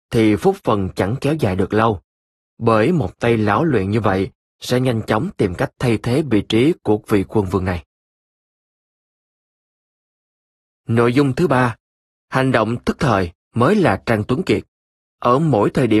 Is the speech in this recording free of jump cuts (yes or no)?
no